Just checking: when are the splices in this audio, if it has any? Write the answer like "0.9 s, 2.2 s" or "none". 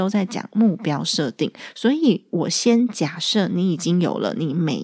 none